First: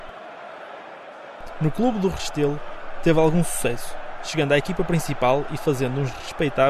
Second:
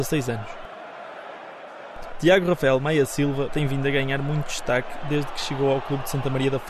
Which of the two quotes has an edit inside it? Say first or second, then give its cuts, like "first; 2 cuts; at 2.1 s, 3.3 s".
second; 2 cuts; at 2.1 s, 3.5 s